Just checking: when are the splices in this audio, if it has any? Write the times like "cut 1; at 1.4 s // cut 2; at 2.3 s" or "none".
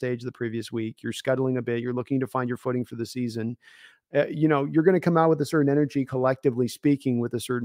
none